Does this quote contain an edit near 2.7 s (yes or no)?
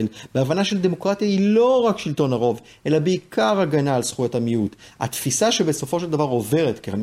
no